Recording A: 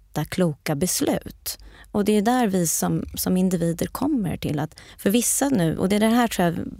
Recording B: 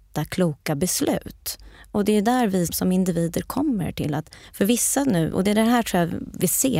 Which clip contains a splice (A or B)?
B